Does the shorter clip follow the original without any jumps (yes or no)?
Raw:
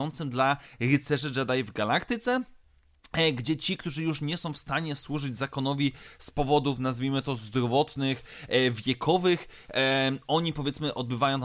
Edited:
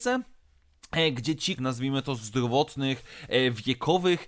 no